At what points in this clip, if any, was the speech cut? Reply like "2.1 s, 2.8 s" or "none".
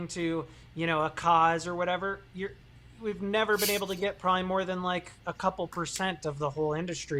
none